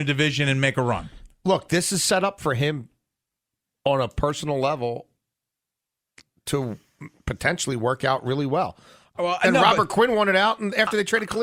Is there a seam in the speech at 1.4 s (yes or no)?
no